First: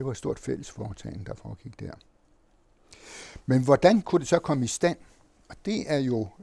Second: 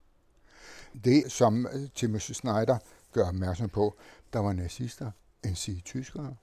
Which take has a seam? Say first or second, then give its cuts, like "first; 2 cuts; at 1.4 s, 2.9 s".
second; 2 cuts; at 1.2 s, 4.2 s